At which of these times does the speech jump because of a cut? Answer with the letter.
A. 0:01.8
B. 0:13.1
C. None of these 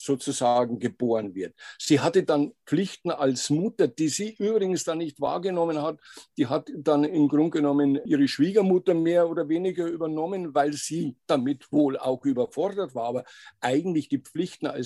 C